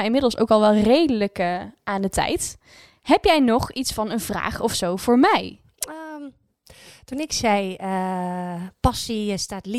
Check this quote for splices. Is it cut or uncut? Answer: uncut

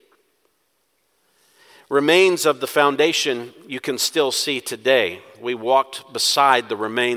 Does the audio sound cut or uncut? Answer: uncut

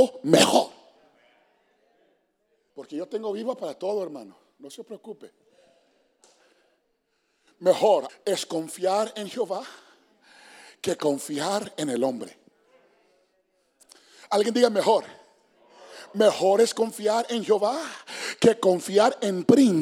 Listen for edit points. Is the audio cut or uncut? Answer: cut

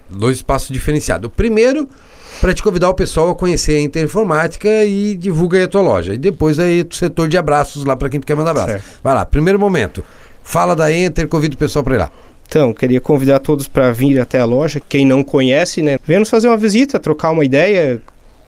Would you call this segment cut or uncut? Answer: cut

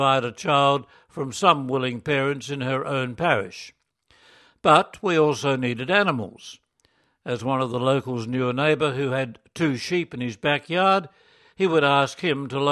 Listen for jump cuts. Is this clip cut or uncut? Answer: uncut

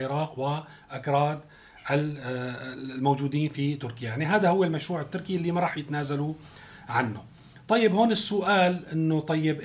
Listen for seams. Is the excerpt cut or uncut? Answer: uncut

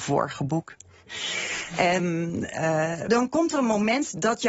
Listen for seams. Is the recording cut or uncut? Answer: cut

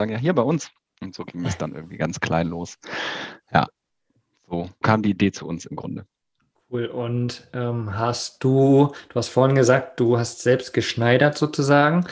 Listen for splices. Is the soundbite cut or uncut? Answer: cut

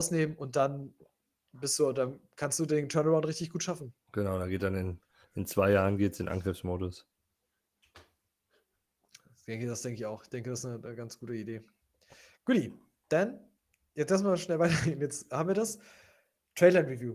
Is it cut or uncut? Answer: uncut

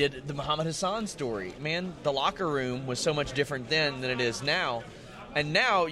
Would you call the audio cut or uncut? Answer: cut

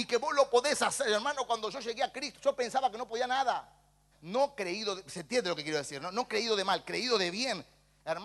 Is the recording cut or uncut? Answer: cut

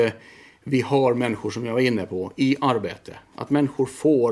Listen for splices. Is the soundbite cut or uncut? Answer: uncut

